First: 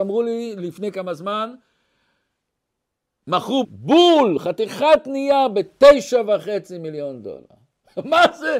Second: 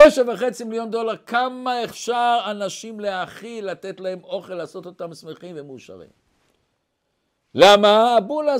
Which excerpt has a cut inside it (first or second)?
first